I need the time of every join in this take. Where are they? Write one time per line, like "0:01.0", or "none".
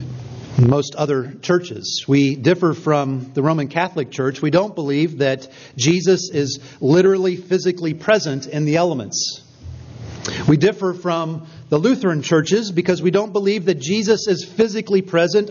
none